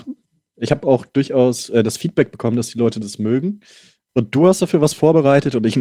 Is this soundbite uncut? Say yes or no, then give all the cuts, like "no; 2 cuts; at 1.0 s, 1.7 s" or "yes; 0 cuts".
yes; 0 cuts